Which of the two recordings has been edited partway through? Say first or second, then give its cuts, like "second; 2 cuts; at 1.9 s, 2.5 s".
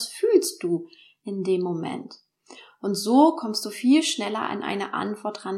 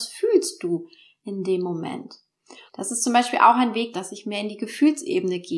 second; 2 cuts; at 2.7 s, 3.9 s